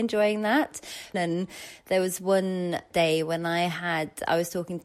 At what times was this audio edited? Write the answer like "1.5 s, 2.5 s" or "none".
1.1 s